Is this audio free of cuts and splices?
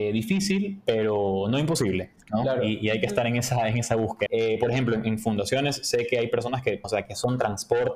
no; 2 cuts; at 4.3 s, 6.8 s

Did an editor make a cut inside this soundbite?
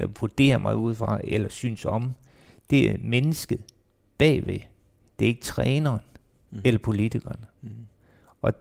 no; 0 cuts

